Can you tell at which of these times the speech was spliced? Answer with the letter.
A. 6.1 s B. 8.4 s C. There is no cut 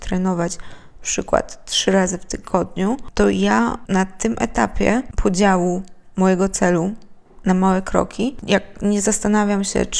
B